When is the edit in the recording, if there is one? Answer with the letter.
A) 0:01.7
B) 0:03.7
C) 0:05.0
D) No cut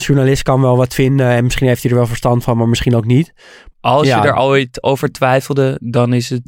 B